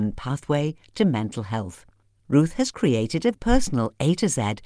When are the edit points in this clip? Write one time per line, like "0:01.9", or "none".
0:03.3